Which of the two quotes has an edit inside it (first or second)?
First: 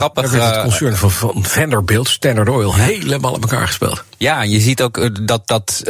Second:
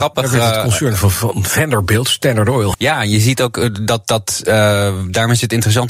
second